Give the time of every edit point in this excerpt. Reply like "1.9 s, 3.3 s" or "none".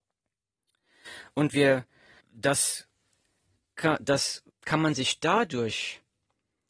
2.2 s, 4.5 s